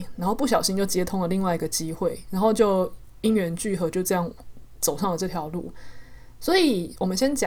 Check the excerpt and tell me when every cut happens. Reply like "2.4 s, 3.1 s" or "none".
none